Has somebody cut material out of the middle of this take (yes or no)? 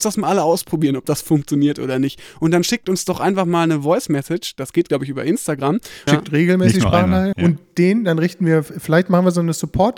yes